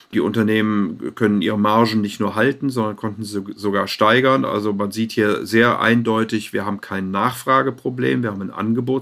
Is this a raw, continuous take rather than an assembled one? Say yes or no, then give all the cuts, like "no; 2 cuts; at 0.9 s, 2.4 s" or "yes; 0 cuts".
yes; 0 cuts